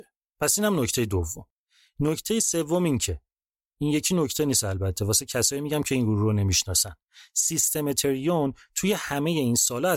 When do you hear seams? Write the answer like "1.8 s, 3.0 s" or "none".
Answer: none